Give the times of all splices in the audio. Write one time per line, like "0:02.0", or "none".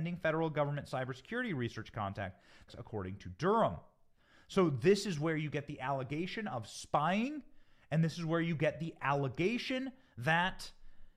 0:02.7